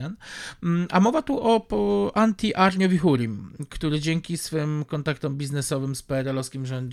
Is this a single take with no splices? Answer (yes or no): yes